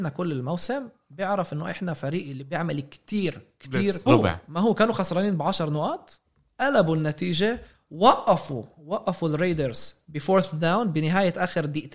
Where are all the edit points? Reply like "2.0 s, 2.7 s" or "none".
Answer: 4.1 s